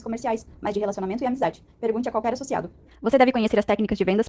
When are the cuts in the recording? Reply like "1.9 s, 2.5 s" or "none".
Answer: 2.9 s